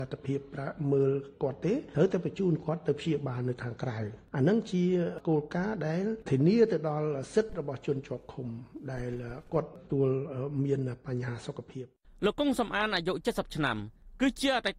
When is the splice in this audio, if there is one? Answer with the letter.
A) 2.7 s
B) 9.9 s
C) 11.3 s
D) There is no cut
B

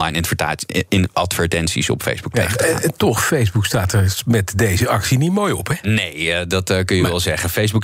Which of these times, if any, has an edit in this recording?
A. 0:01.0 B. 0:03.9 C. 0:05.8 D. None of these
D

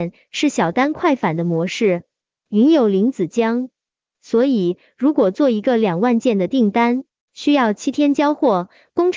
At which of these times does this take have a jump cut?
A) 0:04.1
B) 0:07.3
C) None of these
C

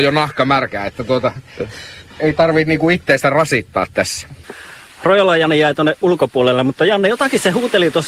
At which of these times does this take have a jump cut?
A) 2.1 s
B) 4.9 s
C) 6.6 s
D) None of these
A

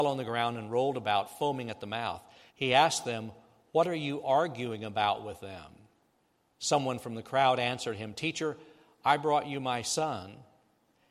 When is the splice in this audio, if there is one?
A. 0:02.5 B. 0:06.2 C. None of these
A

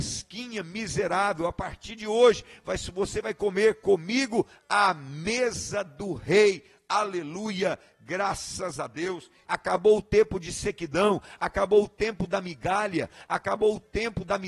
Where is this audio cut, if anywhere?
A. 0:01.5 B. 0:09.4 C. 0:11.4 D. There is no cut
B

